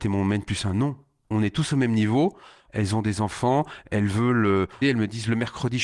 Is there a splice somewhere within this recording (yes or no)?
yes